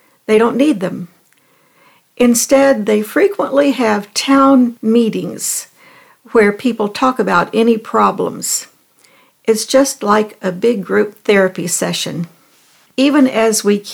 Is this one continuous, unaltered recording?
no; 1 cut; at 12.9 s

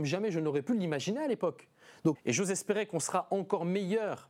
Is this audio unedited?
no; 1 cut; at 2.1 s

